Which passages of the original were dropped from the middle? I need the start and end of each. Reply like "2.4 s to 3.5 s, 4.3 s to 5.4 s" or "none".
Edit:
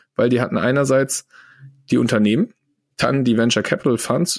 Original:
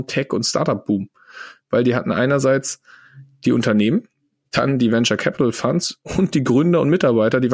none